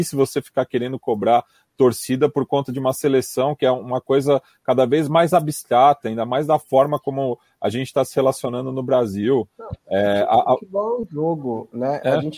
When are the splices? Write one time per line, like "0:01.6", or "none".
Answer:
none

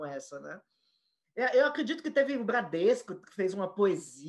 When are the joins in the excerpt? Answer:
none

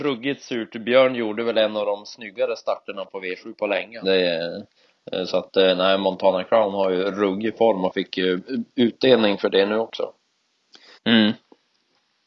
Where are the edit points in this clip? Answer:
0:04.0
0:10.9

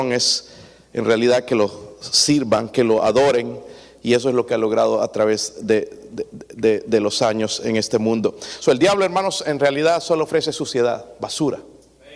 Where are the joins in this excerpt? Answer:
none

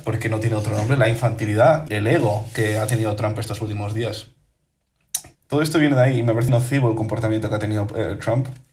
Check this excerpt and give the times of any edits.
0:01.9
0:05.3
0:06.5

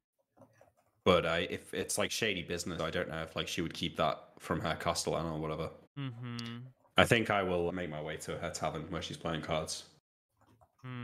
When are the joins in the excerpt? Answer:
0:02.8
0:05.9
0:07.7

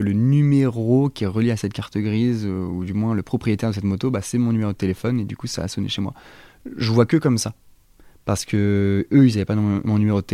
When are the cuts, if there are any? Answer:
none

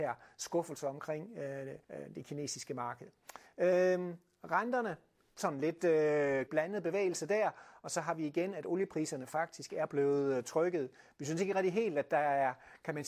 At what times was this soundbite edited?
0:01.8
0:06.5

